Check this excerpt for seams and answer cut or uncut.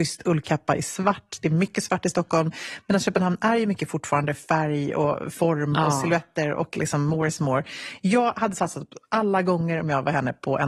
uncut